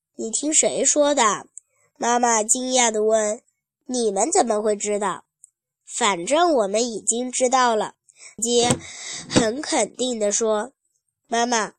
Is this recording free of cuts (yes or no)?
no